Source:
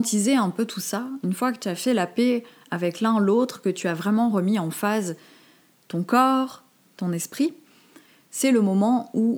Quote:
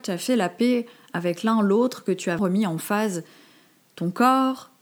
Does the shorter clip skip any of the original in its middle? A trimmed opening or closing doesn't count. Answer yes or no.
yes